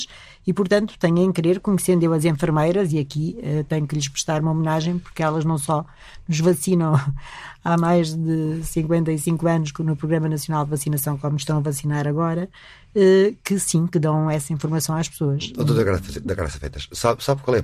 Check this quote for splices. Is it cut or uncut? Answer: uncut